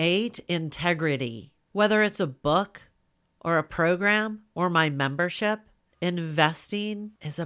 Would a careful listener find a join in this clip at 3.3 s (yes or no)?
no